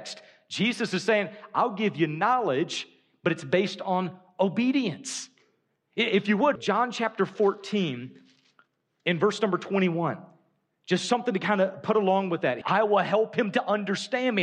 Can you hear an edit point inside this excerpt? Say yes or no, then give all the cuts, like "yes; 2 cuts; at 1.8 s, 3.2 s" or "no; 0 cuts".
yes; 2 cuts; at 6.6 s, 12.6 s